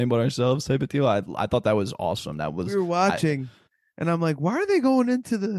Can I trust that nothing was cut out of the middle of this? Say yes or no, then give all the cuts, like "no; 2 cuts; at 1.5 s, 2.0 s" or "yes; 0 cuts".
yes; 0 cuts